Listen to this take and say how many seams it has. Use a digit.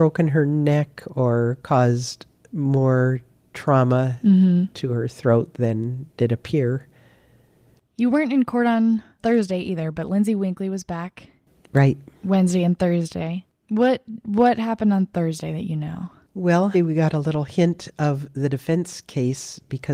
2